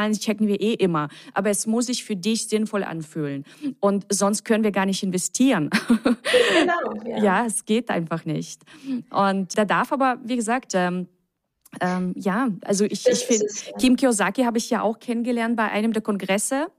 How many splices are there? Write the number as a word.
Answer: one